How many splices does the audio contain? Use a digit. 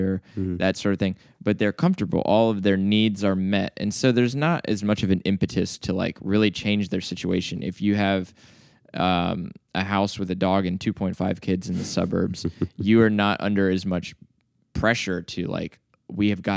0